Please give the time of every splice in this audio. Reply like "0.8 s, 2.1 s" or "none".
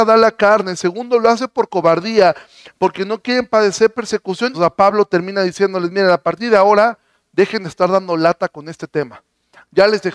4.5 s